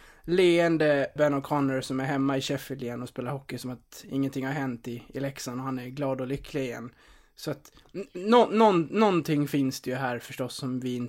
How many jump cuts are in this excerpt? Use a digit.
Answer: 1